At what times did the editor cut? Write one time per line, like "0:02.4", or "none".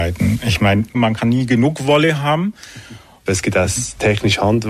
0:00.9
0:03.3